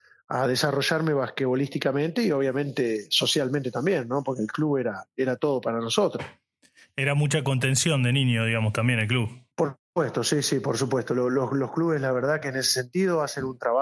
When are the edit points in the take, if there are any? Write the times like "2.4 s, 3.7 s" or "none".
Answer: 9.5 s